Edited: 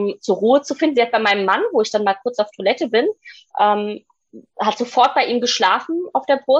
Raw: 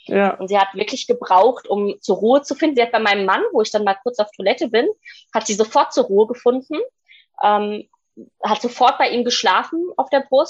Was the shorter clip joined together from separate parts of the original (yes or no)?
yes